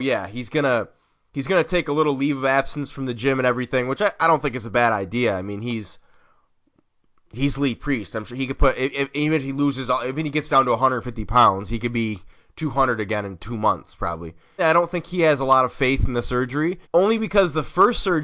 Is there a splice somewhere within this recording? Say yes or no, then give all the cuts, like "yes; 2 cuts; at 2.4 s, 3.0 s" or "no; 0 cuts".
yes; 2 cuts; at 14.6 s, 16.8 s